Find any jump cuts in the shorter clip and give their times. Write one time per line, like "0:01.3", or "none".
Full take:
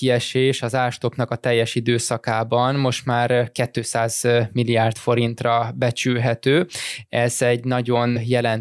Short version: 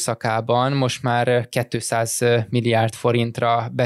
none